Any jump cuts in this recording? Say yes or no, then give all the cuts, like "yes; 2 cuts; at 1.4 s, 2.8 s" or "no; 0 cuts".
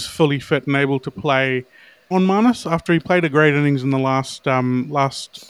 yes; 1 cut; at 2.1 s